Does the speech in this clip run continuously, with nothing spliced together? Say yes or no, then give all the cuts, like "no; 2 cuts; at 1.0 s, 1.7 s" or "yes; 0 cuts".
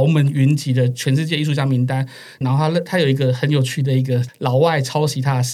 no; 1 cut; at 2.4 s